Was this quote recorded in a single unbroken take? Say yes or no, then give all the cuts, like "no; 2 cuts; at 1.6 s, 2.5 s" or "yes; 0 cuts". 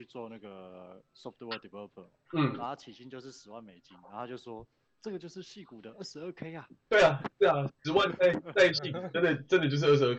yes; 0 cuts